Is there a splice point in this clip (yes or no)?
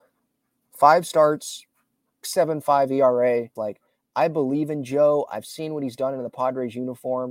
yes